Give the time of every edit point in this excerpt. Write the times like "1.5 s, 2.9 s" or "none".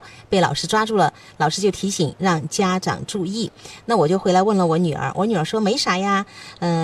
none